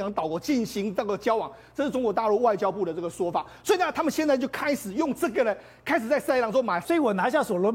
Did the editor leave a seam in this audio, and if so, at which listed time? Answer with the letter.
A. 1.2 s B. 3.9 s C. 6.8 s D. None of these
C